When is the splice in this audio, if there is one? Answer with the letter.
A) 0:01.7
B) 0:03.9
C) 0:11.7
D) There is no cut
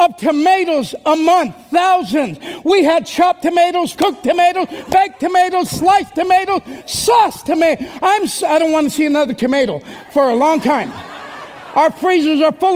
B